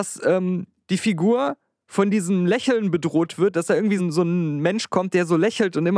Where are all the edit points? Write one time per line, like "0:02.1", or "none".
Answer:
0:04.0